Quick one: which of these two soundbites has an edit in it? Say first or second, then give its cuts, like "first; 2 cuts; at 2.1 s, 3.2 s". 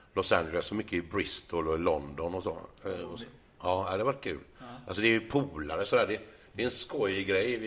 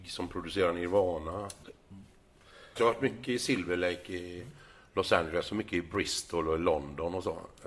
second; 2 cuts; at 1.6 s, 2.8 s